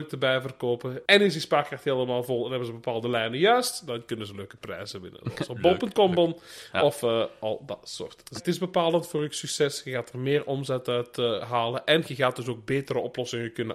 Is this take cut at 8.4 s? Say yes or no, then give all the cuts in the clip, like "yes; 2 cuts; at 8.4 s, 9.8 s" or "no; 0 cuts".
yes; 1 cut; at 8.4 s